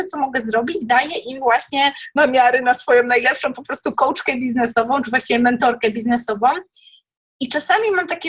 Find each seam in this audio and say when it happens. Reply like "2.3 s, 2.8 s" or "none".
none

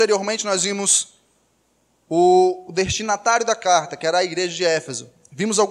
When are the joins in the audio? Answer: none

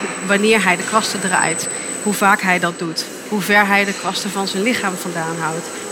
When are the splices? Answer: none

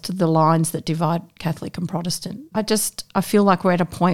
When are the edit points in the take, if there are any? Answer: 2.5 s

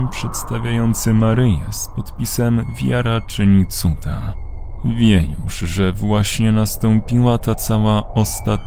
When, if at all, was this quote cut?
none

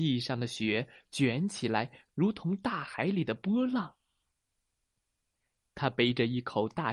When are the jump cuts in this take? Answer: 2.1 s, 5.6 s

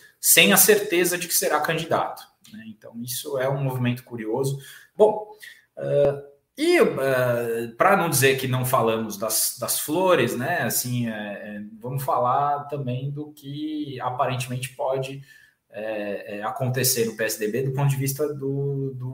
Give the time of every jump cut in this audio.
4.9 s

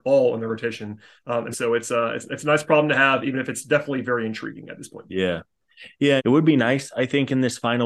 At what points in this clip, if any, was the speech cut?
1.5 s, 6.2 s

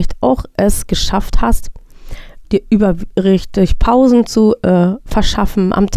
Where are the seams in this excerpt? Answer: 2.4 s

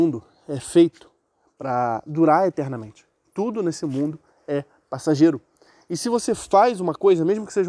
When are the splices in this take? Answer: none

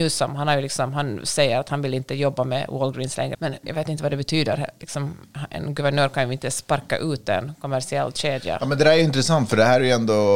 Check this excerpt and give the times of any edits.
3.3 s

